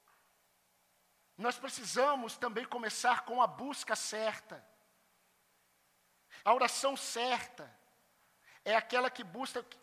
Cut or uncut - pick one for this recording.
cut